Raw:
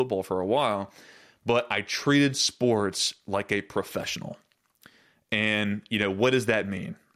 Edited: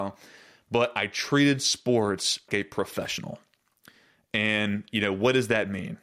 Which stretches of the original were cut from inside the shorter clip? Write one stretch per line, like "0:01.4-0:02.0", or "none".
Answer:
0:03.2-0:03.5